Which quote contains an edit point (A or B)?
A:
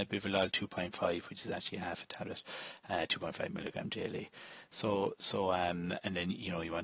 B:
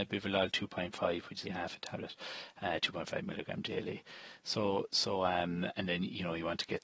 B